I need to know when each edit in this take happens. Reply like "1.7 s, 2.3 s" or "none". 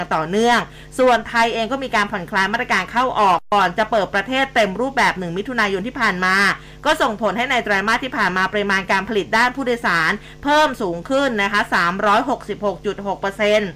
none